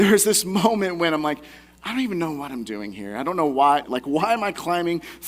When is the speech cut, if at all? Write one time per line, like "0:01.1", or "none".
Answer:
0:03.8